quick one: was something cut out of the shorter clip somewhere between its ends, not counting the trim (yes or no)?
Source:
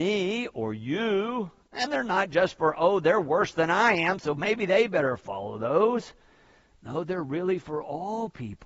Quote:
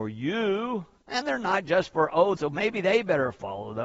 yes